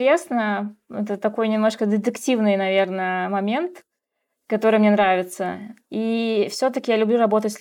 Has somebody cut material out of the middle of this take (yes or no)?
no